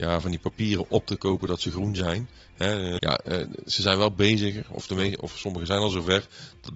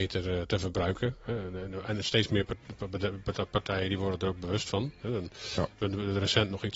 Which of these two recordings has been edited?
first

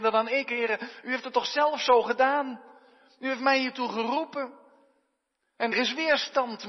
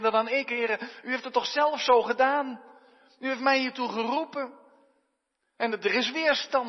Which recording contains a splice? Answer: first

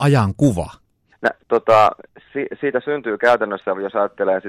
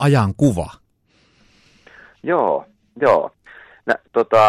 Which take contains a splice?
first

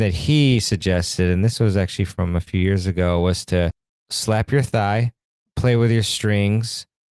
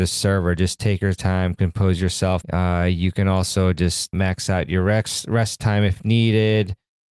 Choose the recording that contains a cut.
second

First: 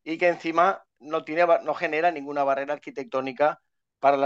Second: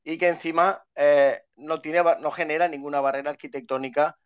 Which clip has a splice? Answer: first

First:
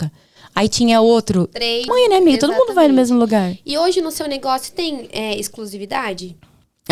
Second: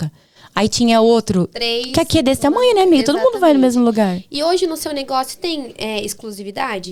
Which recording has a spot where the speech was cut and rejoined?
first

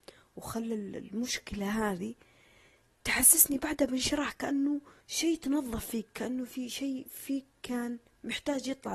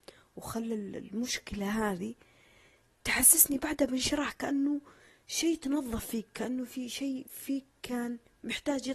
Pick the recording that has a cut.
first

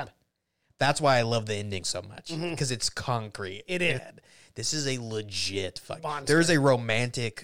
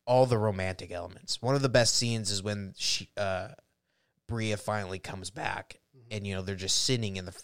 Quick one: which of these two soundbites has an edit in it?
first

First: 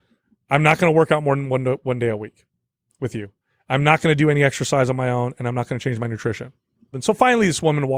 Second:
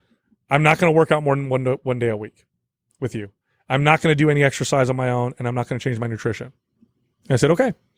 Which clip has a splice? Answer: first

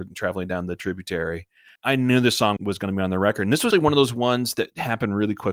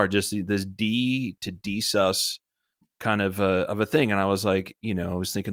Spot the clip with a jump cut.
first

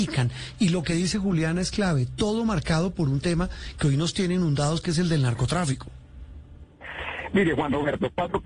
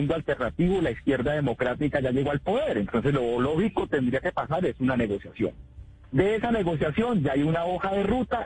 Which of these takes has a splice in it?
second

